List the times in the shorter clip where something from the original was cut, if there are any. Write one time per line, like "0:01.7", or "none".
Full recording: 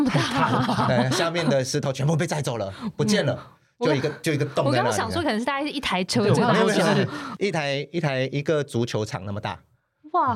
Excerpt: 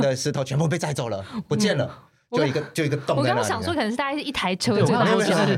none